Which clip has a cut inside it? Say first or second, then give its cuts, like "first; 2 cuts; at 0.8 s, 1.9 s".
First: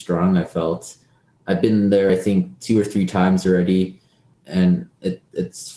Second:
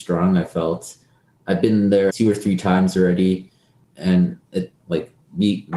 second; 2 cuts; at 2.1 s, 4.8 s